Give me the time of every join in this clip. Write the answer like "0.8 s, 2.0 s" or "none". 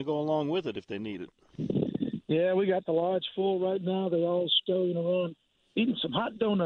none

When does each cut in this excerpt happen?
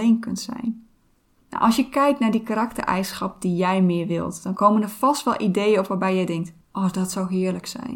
1.4 s, 6.6 s

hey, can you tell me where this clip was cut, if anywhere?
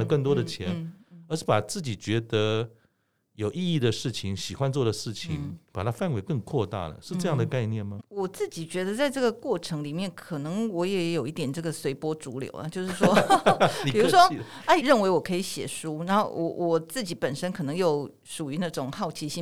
8.0 s, 14.8 s

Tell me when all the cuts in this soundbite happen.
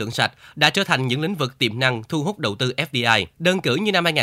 3.3 s

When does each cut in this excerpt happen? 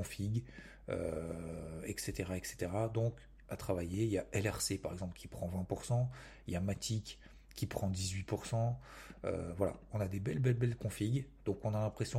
3.4 s

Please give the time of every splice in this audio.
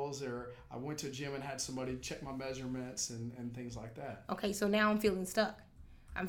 none

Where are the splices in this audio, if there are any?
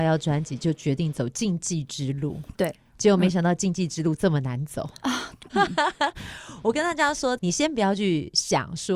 5.5 s, 7.4 s

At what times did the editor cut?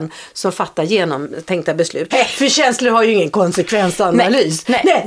2.1 s

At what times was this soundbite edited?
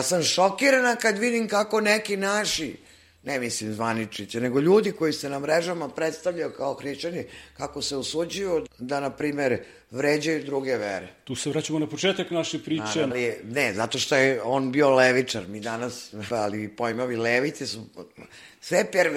8.7 s, 13.1 s, 16.3 s

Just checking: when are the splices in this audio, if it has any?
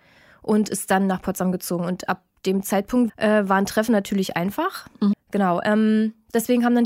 3.1 s, 5.1 s

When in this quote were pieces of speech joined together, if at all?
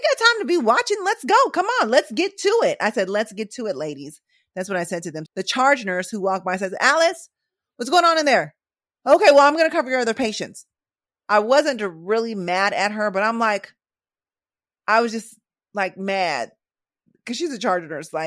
5.3 s

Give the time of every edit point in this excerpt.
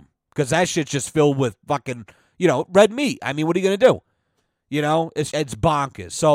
5.3 s

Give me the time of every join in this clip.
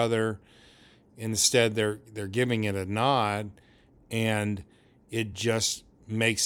none

